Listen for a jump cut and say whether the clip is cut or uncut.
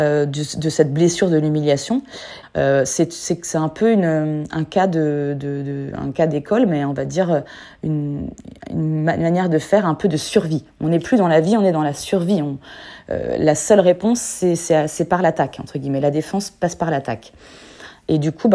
cut